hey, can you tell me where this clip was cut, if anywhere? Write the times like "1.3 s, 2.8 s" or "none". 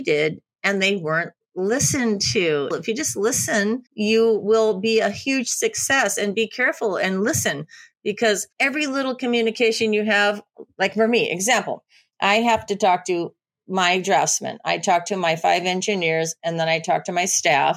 2.7 s, 3.9 s, 8.5 s